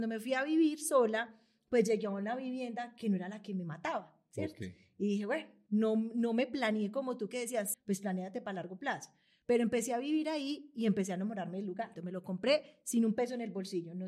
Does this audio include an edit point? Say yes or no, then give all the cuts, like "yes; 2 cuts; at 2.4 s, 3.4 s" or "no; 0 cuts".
yes; 3 cuts; at 5.7 s, 7.7 s, 12.0 s